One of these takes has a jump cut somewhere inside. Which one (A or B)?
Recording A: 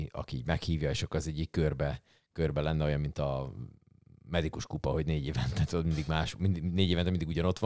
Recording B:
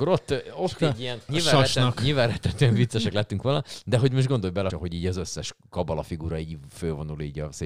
B